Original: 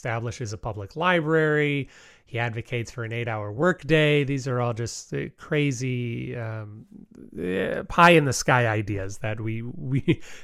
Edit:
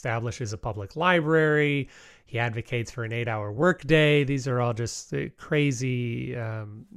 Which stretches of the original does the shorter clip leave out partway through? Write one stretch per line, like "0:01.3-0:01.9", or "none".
none